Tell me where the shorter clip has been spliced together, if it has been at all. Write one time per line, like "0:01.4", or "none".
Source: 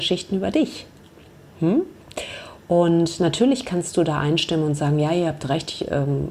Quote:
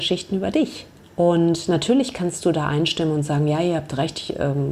0:01.1